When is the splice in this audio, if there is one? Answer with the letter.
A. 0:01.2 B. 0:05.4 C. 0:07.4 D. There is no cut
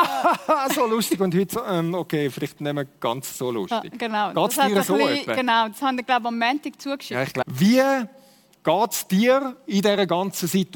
C